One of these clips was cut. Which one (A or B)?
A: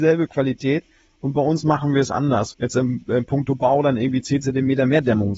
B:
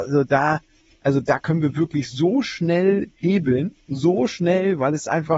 A